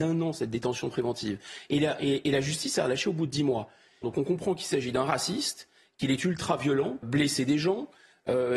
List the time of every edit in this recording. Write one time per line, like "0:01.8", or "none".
0:04.0
0:07.0